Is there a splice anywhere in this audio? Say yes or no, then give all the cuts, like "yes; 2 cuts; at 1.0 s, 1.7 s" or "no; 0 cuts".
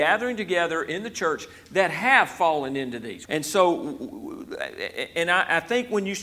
yes; 1 cut; at 3.3 s